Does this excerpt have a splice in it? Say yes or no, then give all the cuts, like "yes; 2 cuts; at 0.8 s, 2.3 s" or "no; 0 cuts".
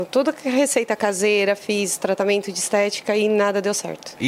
no; 0 cuts